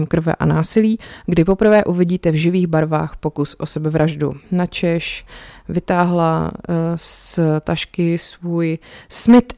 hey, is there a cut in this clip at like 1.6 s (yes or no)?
no